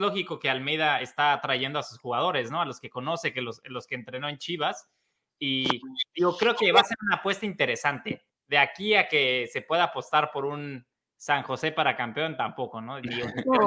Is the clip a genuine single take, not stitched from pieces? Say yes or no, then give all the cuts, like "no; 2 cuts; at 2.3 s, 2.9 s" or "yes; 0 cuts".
yes; 0 cuts